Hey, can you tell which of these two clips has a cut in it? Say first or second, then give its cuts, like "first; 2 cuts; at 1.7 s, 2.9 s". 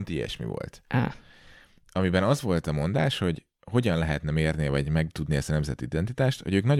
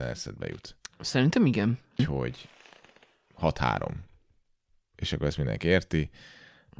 second; 1 cut; at 2.0 s